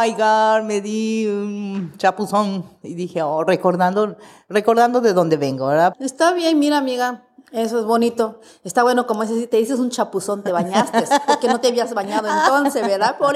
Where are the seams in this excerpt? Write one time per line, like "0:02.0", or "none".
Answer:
0:05.9